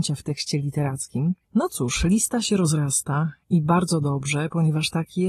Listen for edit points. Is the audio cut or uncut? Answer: cut